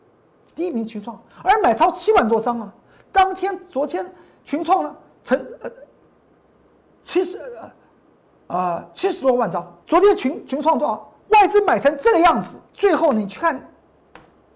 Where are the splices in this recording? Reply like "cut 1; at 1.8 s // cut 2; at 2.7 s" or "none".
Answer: cut 1; at 9.8 s // cut 2; at 11.2 s // cut 3; at 12.7 s